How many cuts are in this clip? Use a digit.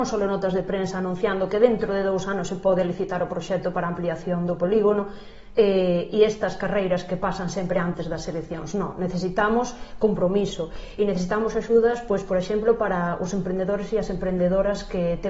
0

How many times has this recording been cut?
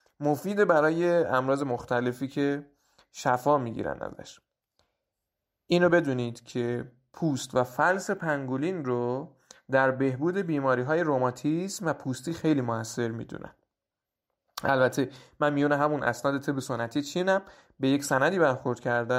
0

